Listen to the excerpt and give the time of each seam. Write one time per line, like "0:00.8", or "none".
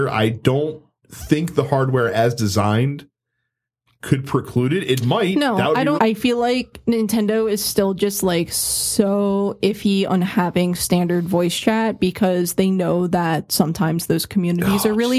0:06.0